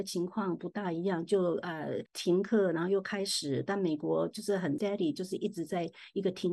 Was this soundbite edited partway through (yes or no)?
no